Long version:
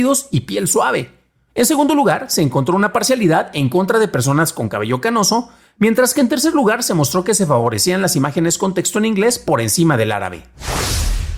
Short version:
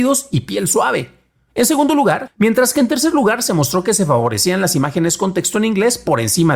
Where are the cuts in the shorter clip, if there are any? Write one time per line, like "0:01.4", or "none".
0:02.3